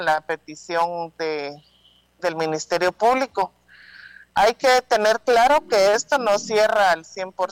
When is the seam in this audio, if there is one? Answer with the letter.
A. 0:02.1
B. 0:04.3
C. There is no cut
C